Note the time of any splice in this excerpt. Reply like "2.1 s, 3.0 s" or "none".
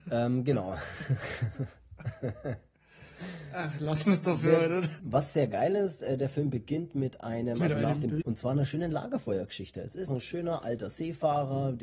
5.0 s, 8.2 s, 10.1 s

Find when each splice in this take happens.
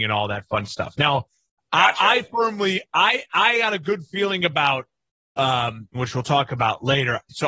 5.9 s

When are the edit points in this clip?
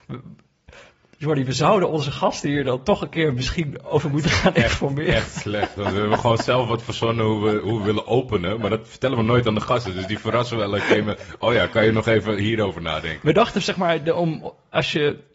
none

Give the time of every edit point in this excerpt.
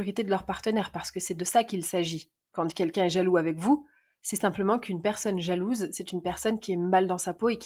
none

